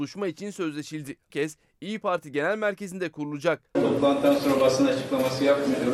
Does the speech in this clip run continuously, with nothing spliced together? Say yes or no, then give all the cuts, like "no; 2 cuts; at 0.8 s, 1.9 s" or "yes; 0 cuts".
no; 2 cuts; at 1.3 s, 3.7 s